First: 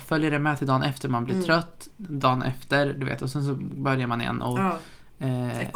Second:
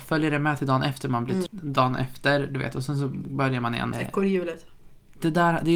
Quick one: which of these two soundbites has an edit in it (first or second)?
second